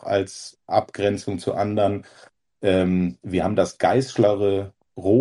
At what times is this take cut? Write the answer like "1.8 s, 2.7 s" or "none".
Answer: none